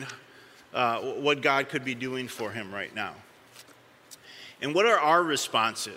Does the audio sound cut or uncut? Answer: uncut